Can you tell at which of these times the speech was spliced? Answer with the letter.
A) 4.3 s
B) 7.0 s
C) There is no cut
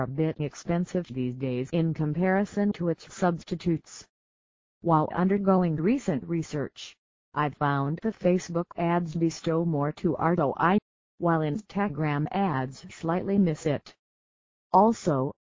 C